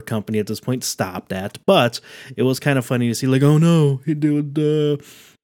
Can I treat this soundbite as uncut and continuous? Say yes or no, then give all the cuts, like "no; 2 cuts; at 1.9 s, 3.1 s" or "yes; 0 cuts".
yes; 0 cuts